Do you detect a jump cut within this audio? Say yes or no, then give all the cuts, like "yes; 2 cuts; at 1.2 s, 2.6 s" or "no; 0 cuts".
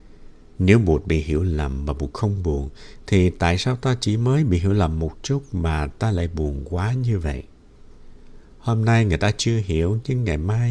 no; 0 cuts